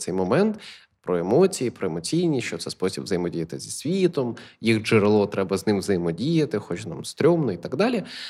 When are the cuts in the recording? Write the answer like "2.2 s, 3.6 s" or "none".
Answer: none